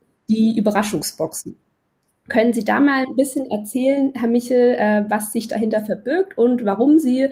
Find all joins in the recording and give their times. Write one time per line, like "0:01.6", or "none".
none